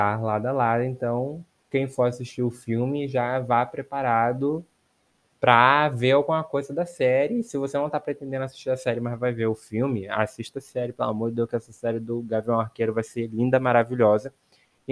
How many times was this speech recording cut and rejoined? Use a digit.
0